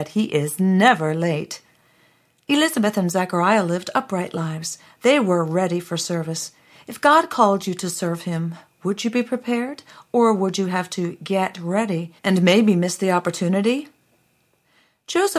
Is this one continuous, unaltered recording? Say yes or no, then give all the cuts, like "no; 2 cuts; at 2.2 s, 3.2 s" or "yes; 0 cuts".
no; 1 cut; at 12.2 s